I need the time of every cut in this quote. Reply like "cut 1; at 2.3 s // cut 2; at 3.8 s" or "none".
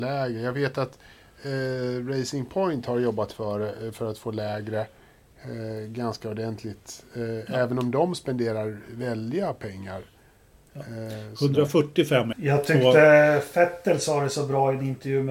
cut 1; at 12.3 s